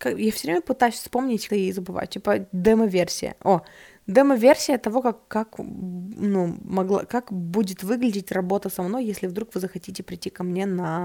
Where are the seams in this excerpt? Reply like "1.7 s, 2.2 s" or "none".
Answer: 1.5 s